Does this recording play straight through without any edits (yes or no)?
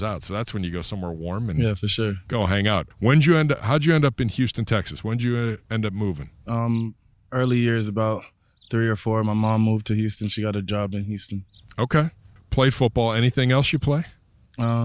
no